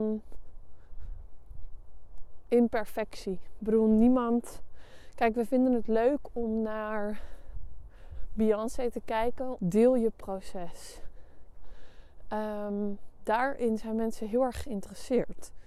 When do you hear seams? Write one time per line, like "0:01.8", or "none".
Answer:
0:09.6